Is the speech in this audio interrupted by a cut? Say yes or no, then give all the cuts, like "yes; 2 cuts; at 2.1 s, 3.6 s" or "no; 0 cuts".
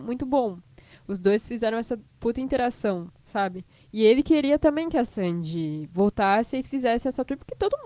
yes; 1 cut; at 3.8 s